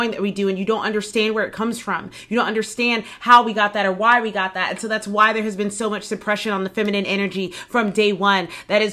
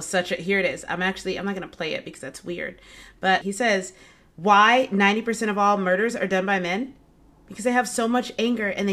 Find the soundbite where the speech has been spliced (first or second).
second